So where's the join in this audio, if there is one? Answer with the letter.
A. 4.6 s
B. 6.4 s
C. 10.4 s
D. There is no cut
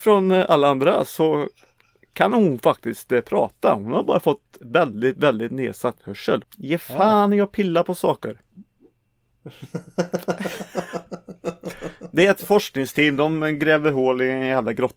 B